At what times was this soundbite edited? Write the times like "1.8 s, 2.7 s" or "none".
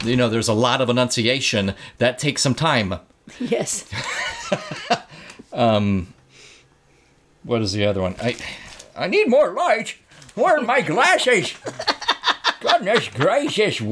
none

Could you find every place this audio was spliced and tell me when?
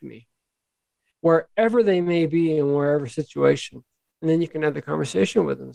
none

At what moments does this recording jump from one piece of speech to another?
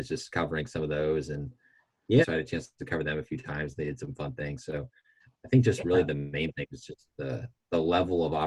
2.2 s

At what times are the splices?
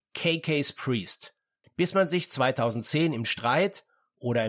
1.6 s

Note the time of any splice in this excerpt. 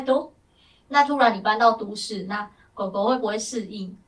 none

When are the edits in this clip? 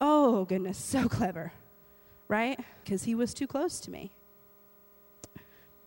2.8 s

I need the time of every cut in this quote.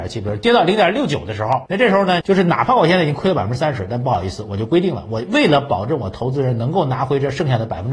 2.2 s

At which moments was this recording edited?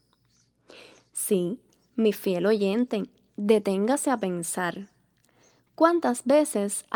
none

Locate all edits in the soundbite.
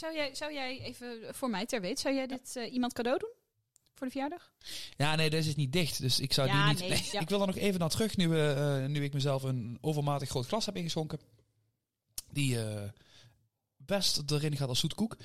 7.1 s

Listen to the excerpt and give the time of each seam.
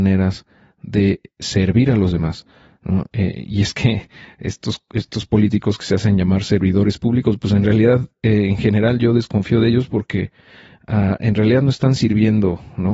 none

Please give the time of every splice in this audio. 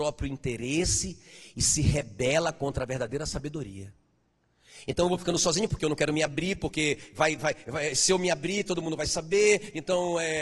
none

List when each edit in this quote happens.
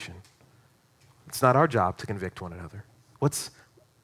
3.1 s

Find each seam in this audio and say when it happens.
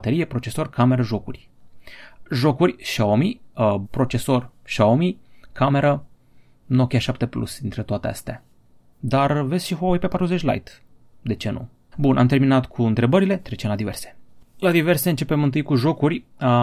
3.8 s, 11.9 s

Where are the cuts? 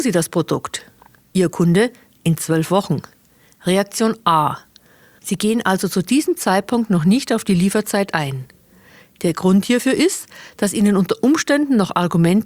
5.2 s

